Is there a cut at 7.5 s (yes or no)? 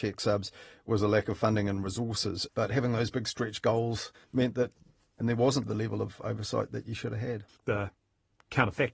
yes